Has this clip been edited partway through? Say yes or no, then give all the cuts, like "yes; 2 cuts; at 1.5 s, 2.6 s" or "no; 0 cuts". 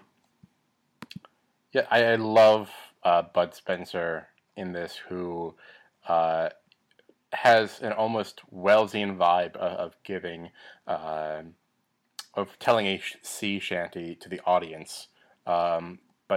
no; 0 cuts